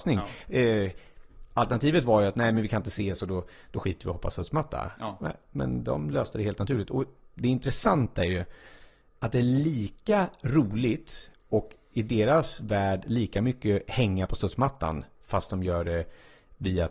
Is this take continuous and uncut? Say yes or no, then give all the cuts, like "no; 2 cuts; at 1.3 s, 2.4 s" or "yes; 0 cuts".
yes; 0 cuts